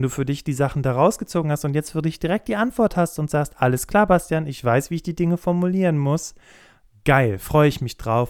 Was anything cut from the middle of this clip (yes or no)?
no